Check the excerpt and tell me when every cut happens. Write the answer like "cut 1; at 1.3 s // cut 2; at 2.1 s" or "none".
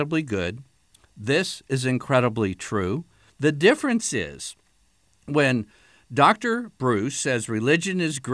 cut 1; at 3.3 s

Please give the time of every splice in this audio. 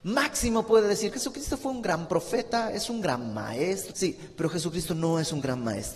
cut 1; at 1.1 s // cut 2; at 3.9 s

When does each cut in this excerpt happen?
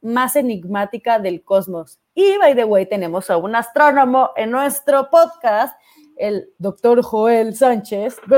none

